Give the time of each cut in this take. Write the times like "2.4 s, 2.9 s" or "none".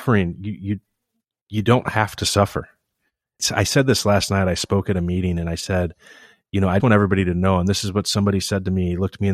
6.8 s